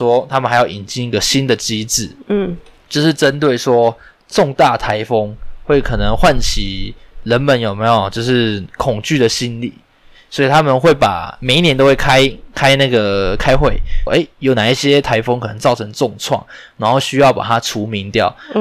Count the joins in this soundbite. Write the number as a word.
one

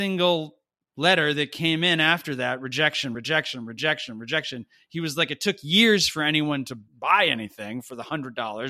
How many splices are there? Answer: two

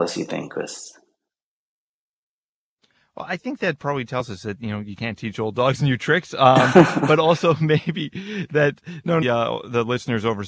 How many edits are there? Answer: one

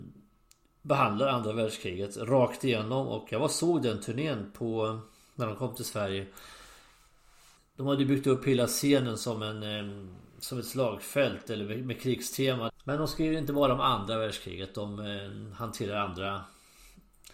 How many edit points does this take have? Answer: one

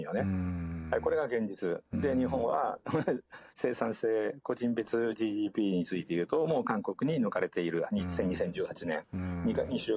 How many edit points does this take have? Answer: zero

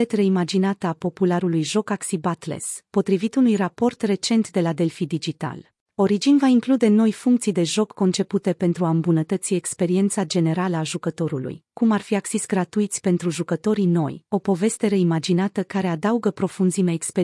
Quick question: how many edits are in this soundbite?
one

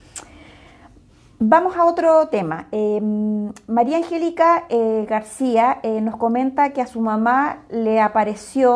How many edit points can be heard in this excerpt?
zero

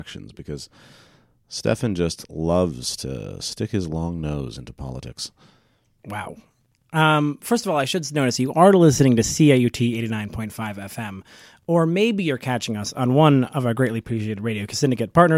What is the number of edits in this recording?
zero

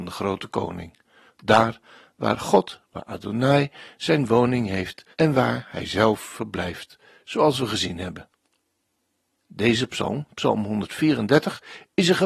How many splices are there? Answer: three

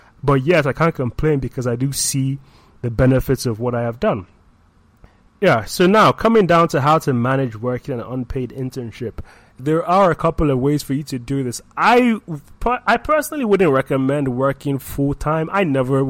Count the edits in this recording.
one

